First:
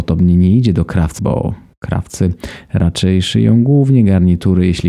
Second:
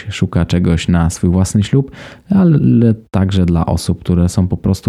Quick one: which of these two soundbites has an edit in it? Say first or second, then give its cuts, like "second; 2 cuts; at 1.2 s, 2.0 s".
first; 1 cut; at 1.2 s